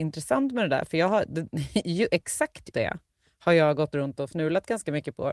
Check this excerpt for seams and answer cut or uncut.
cut